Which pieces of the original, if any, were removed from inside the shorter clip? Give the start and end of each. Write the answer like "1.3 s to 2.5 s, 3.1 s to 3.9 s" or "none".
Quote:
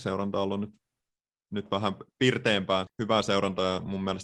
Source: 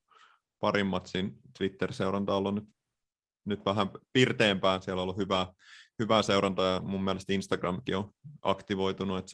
4.8 s to 5.9 s